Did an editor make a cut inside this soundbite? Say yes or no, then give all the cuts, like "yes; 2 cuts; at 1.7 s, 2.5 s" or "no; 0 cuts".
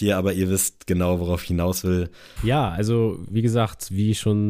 yes; 1 cut; at 2.4 s